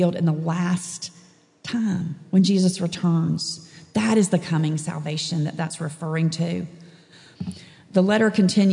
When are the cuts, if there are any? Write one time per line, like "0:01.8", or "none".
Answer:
none